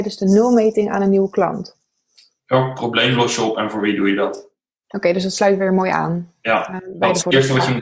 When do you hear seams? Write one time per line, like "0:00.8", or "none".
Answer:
none